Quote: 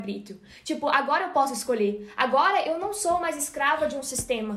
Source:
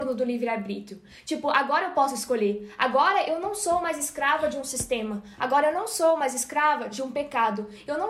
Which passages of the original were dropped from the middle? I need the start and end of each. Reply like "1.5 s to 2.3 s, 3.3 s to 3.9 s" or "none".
none